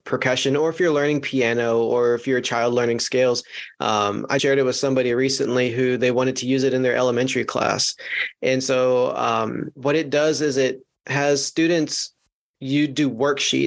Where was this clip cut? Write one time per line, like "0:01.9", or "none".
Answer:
0:04.4